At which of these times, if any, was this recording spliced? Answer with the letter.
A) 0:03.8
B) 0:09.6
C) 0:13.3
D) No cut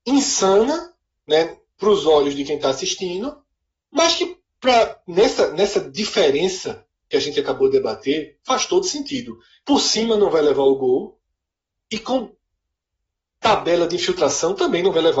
B